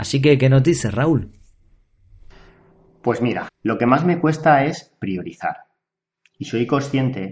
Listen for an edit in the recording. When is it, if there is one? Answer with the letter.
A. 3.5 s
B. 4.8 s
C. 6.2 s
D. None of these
A